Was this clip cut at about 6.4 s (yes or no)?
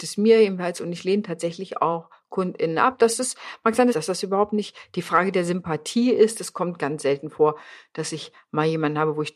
no